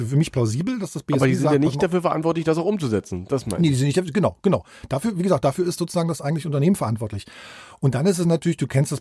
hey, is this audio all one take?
yes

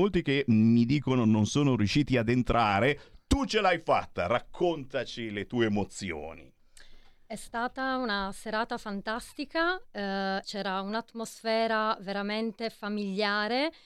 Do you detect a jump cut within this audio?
yes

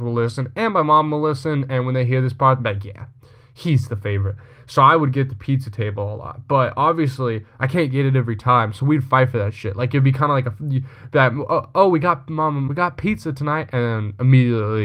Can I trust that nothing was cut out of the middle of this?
no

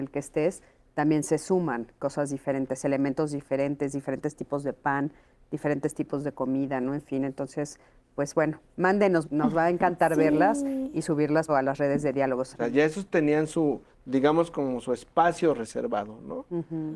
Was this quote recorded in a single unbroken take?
no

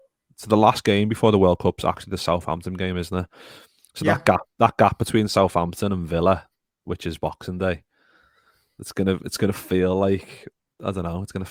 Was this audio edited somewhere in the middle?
no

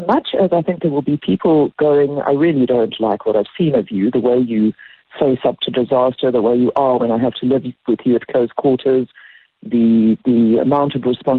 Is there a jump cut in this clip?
no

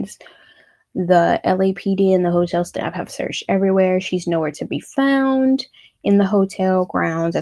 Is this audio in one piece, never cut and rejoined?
yes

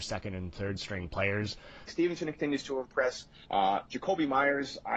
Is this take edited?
yes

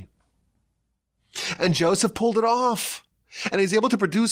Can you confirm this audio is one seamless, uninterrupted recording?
yes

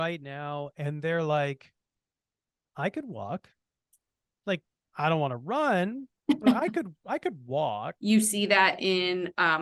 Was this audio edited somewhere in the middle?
yes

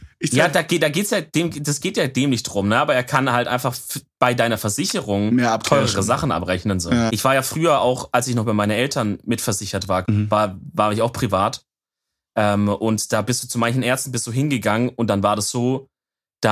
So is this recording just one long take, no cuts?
no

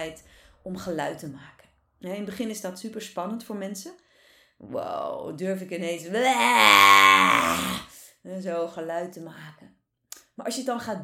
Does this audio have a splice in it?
no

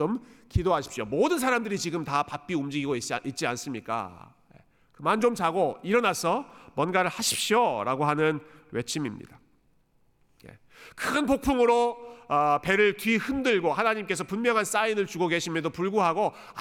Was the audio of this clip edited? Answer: no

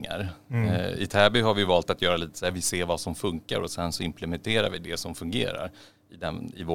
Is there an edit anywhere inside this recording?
no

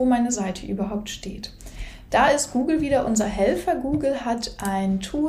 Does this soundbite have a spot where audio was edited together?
no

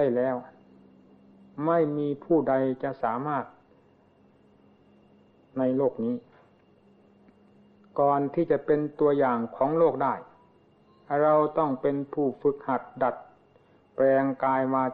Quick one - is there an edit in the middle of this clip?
no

